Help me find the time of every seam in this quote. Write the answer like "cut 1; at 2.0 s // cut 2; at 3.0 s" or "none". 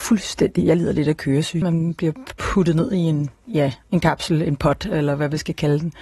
cut 1; at 1.6 s